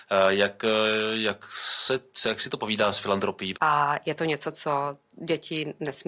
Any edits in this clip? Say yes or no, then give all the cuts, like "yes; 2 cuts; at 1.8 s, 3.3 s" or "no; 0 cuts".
yes; 1 cut; at 3.5 s